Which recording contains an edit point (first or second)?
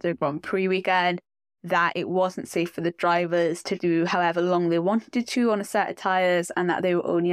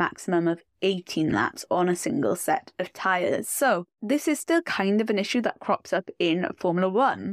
first